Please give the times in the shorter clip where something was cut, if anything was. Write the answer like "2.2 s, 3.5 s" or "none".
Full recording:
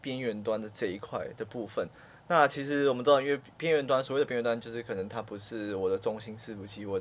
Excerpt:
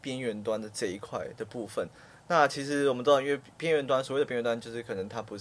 none